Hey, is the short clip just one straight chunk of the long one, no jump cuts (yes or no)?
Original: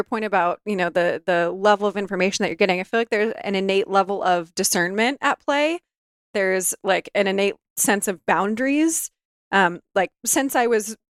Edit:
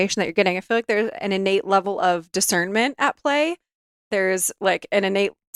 yes